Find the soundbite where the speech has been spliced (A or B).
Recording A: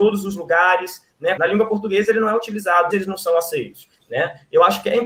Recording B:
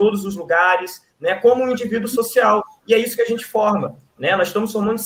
A